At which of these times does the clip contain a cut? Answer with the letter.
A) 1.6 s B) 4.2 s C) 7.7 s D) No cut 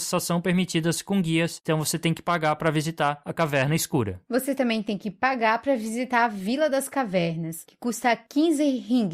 D